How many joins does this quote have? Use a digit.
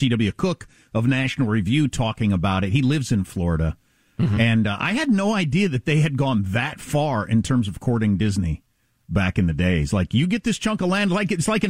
0